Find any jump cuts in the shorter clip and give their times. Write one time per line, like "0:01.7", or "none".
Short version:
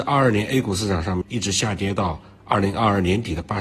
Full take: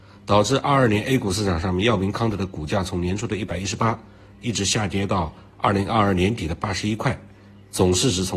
0:01.2